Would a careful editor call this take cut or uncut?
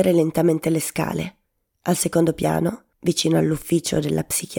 uncut